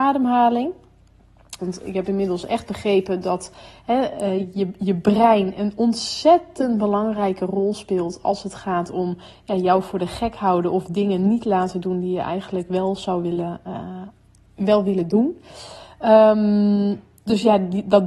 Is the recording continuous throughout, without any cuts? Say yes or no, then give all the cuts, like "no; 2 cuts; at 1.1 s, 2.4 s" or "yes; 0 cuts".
no; 1 cut; at 1.6 s